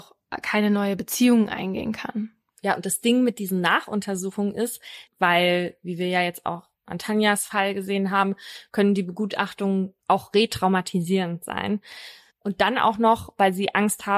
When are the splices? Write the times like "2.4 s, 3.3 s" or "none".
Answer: 5.1 s, 12.3 s